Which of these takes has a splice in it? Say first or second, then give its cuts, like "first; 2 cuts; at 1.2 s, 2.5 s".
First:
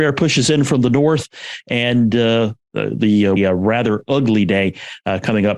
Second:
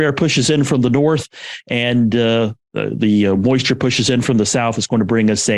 first; 1 cut; at 3.4 s